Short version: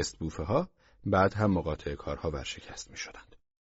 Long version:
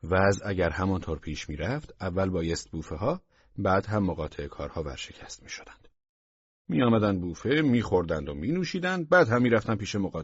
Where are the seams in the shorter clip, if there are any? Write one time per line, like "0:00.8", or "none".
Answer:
none